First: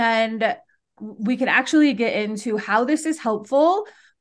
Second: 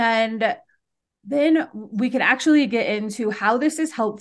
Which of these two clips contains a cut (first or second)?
first